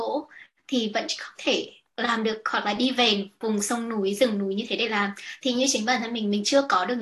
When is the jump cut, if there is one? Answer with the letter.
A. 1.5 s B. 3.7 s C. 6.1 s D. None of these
D